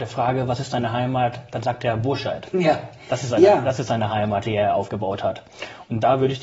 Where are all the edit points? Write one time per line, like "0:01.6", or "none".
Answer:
none

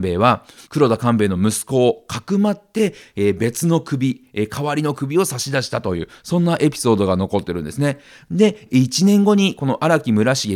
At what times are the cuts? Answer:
none

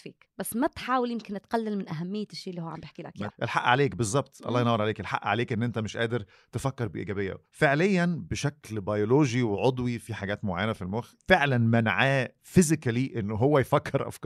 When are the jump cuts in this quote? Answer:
0:03.3
0:07.5

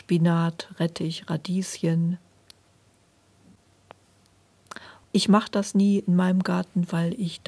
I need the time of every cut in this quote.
0:05.0

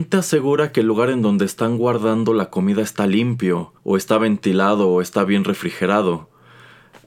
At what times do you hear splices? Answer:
0:03.8

